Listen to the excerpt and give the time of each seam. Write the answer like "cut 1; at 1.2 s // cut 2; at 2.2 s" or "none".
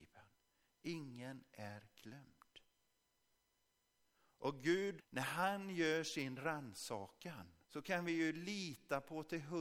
cut 1; at 5.0 s // cut 2; at 7.6 s